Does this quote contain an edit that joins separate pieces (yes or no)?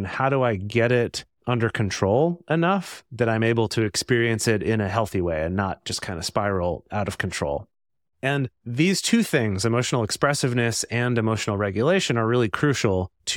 no